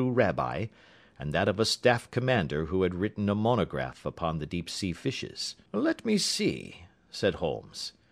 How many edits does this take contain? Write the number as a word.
one